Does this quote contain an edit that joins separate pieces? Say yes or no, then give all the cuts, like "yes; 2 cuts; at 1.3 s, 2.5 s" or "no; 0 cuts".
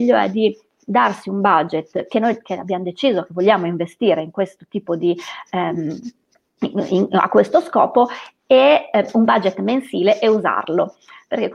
no; 0 cuts